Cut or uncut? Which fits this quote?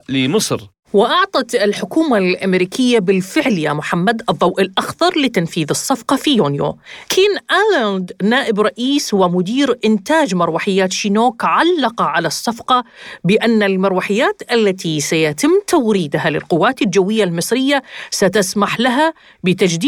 cut